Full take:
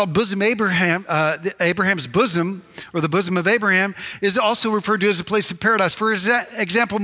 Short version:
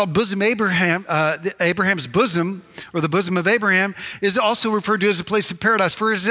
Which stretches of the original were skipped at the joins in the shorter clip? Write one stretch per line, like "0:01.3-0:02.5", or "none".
none